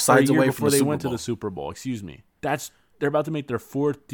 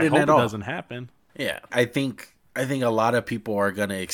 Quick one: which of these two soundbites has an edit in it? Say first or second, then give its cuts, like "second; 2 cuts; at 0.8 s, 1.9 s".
second; 1 cut; at 1.7 s